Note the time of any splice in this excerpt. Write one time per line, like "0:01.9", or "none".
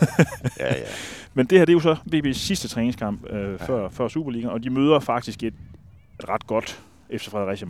0:03.9
0:06.2